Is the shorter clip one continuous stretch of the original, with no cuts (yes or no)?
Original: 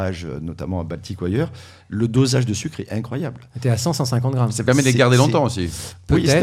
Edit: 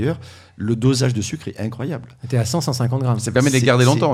yes